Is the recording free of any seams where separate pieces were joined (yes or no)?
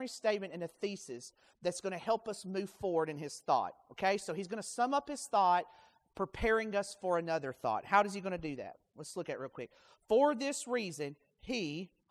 yes